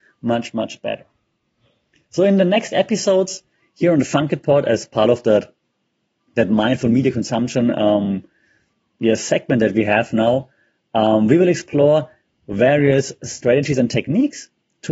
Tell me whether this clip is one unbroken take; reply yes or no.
yes